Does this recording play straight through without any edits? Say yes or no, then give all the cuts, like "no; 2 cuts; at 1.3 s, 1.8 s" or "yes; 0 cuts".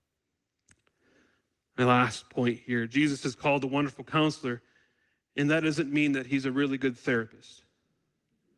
yes; 0 cuts